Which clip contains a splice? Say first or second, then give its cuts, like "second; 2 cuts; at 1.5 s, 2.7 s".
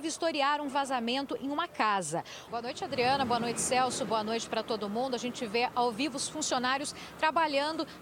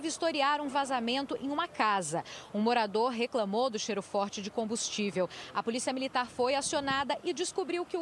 first; 1 cut; at 2.5 s